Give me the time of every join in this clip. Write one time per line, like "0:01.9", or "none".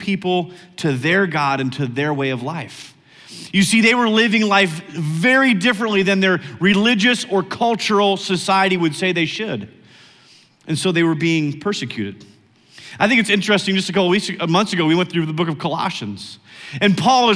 none